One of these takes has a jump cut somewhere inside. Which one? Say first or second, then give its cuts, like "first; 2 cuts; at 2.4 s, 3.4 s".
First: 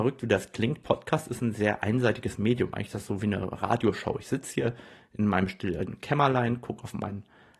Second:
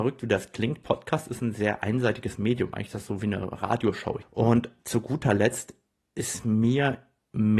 second; 1 cut; at 4.2 s